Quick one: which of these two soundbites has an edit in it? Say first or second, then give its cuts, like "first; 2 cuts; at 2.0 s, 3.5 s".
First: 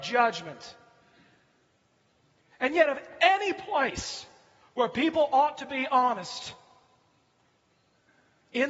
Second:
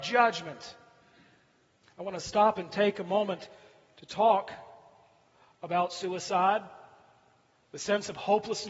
second; 1 cut; at 1.8 s